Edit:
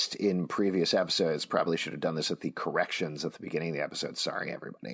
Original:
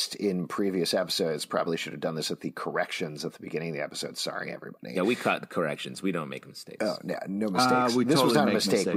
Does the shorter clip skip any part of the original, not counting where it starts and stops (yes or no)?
no